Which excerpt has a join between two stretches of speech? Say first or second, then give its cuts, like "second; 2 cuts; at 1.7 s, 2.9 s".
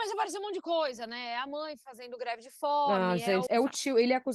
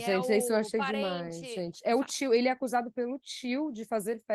first; 1 cut; at 3.5 s